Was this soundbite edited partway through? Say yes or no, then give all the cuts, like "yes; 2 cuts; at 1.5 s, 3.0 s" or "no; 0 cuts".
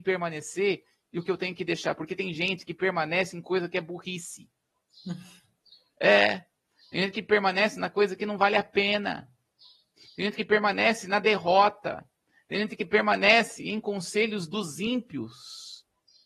no; 0 cuts